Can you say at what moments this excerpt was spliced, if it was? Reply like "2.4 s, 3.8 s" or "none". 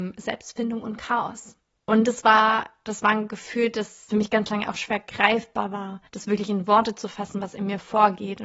1.7 s, 6.1 s